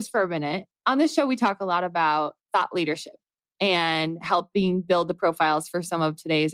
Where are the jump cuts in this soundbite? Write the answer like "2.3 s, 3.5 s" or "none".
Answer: 2.4 s